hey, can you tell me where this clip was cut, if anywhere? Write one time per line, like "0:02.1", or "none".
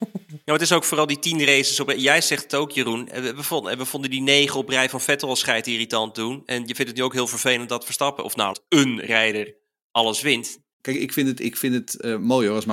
0:08.5
0:10.7